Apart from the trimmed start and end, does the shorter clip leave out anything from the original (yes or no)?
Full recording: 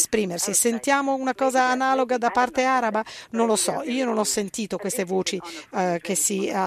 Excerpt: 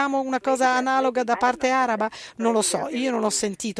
no